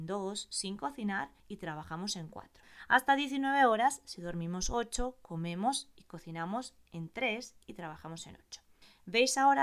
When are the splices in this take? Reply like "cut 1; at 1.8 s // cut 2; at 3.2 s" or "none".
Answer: none